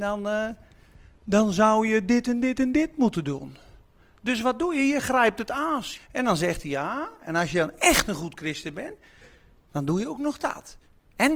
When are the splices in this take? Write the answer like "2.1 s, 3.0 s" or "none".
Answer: 6.0 s